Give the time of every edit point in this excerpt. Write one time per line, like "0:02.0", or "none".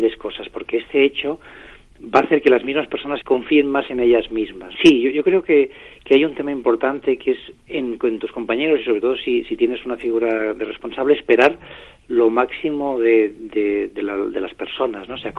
0:03.2
0:04.8